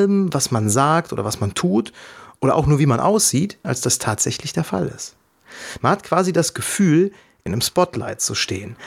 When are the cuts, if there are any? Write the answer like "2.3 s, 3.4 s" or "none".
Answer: 3.6 s, 7.5 s